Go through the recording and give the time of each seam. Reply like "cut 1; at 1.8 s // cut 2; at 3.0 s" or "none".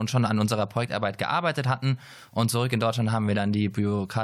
none